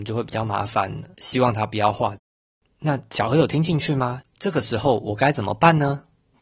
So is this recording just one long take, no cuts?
no; 2 cuts; at 1.1 s, 4.2 s

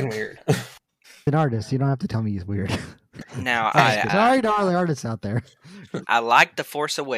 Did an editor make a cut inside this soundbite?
yes; 1 cut; at 4.1 s

